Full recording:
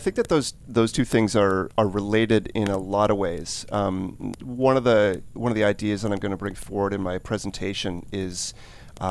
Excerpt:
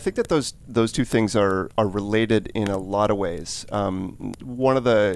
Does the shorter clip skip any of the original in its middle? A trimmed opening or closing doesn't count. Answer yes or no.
no